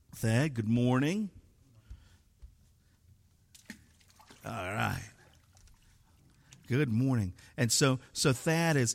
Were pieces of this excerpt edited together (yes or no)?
no